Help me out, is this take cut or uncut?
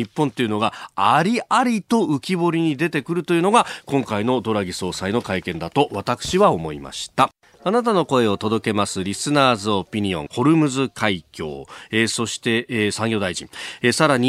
cut